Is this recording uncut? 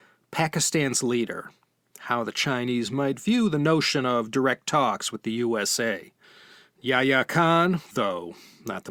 yes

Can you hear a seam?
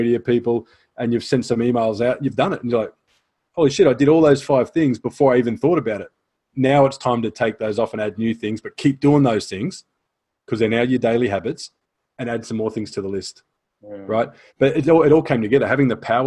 yes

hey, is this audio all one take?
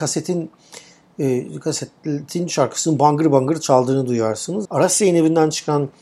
no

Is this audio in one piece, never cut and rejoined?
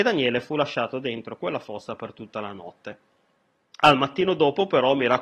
yes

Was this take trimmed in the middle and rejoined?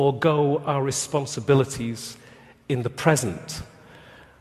no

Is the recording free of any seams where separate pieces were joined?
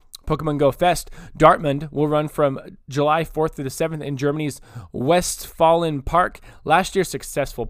yes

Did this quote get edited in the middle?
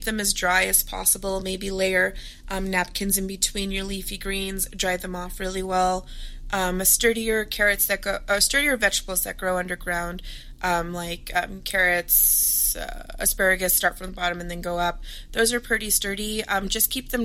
no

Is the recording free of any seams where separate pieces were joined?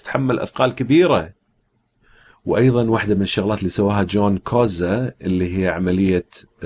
yes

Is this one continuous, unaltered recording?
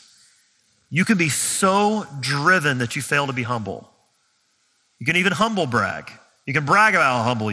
yes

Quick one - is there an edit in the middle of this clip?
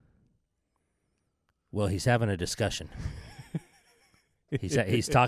no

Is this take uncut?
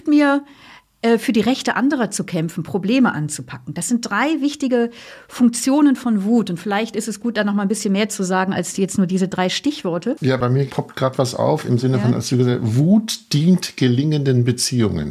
yes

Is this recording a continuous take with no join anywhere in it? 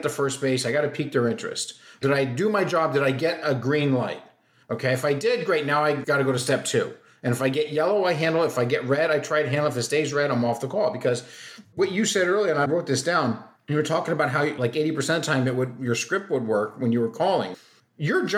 yes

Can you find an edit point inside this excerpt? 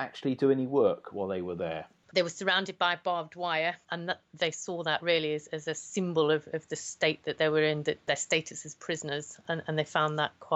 yes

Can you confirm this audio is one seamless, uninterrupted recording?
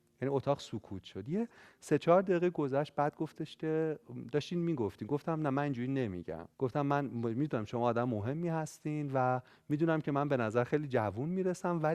no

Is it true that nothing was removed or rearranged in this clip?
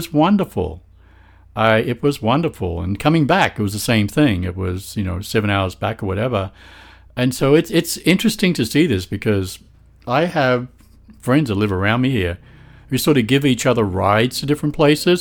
yes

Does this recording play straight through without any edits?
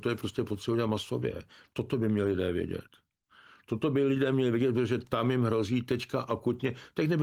yes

